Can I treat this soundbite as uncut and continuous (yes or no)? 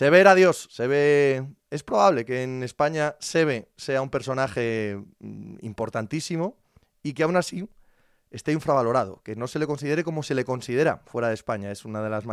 yes